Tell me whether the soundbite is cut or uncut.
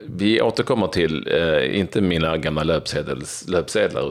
uncut